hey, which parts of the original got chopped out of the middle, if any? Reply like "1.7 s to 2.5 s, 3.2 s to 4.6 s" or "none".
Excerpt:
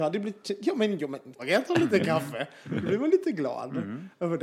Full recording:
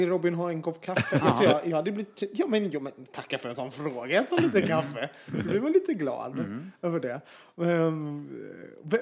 3.1 s to 4.0 s